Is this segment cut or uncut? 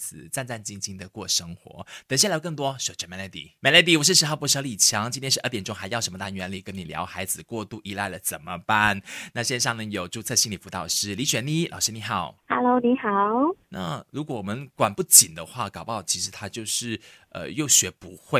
cut